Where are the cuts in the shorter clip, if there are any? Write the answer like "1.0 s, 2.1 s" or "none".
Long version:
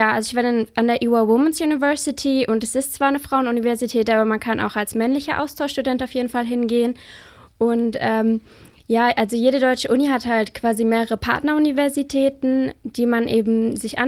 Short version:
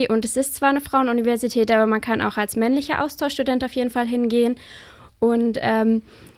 none